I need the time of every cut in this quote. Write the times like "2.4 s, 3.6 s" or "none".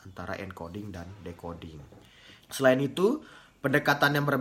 2.4 s